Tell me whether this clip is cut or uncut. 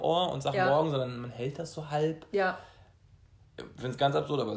uncut